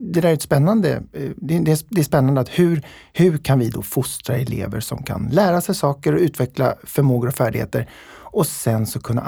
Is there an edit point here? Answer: no; 0 cuts

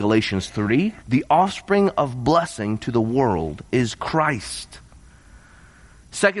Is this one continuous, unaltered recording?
no; 1 cut; at 1.0 s

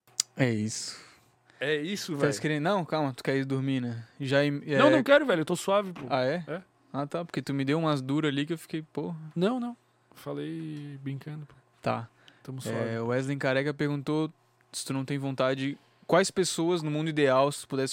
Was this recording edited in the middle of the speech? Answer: no; 0 cuts

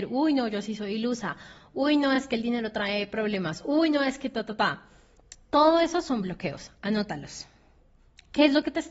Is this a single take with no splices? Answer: yes; 0 cuts

